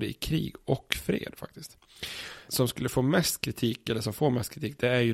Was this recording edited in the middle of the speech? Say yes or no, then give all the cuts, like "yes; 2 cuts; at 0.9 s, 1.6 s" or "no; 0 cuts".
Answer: yes; 1 cut; at 2.5 s